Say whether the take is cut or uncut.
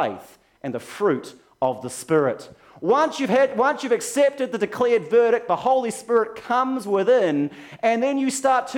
uncut